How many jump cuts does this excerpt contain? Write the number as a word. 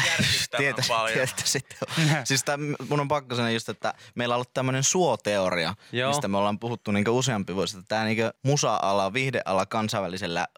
one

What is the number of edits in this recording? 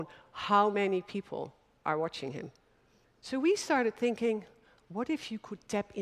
one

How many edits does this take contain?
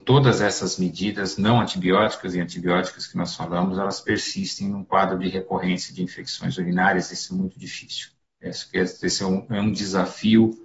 zero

